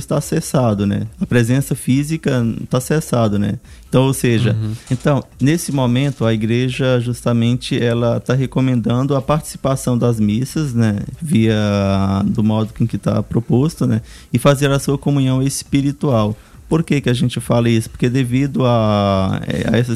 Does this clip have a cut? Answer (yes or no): yes